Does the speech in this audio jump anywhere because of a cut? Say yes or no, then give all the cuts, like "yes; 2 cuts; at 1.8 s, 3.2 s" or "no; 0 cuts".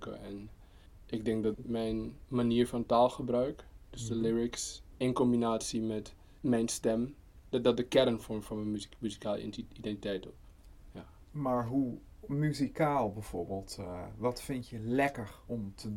no; 0 cuts